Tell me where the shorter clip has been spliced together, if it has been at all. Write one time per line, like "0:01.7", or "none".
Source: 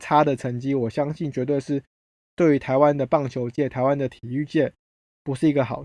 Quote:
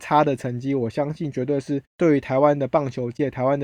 0:01.9